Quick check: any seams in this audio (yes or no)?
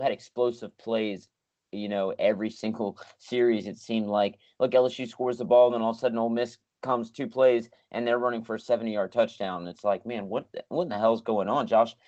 no